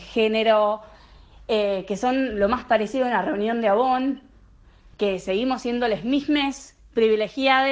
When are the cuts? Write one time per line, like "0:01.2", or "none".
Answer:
none

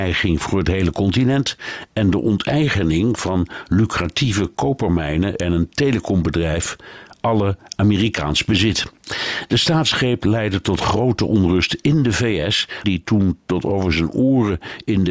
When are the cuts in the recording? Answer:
0:12.8

